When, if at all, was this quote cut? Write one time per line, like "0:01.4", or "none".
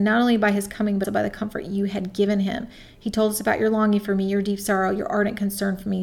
0:01.0